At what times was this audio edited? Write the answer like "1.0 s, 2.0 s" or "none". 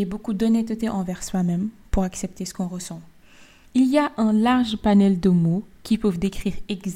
3.6 s